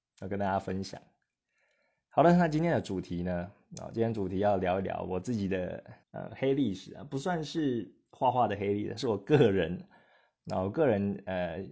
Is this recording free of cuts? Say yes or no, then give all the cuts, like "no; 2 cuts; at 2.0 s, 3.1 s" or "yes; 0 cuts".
no; 1 cut; at 6.0 s